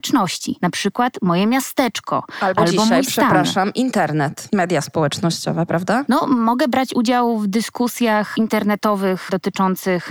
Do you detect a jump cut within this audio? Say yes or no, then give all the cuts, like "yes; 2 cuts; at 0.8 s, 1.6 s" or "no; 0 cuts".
no; 0 cuts